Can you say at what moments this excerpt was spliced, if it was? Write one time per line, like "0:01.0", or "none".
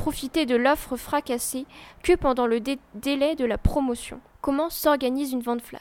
0:04.3